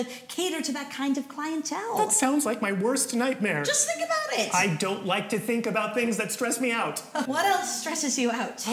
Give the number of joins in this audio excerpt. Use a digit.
1